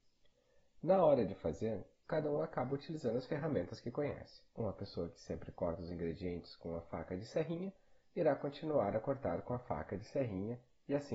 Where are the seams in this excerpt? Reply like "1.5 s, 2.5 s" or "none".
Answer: none